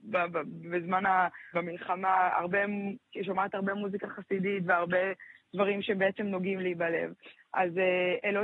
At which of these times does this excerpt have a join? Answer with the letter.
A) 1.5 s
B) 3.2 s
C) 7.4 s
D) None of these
A